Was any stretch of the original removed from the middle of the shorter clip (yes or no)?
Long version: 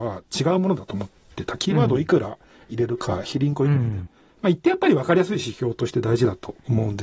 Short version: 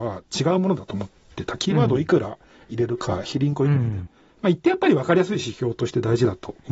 no